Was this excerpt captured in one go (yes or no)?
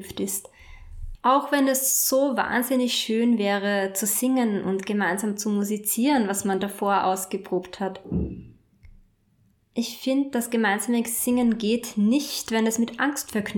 no